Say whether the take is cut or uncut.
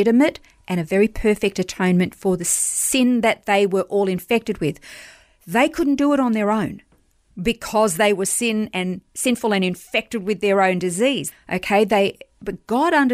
cut